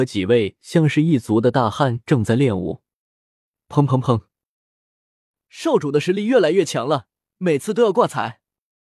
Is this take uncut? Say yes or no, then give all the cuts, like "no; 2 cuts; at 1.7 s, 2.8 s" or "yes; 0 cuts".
yes; 0 cuts